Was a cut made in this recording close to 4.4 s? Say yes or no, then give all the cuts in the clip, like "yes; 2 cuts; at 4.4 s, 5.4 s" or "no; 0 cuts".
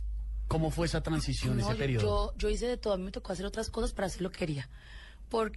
yes; 1 cut; at 4.4 s